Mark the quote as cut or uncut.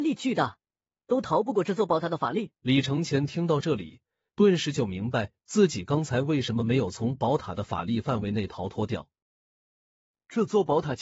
cut